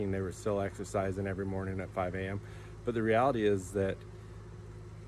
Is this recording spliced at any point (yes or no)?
no